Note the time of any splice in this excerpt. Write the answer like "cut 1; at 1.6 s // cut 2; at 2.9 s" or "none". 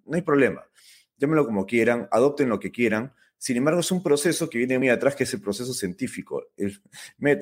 cut 1; at 4.8 s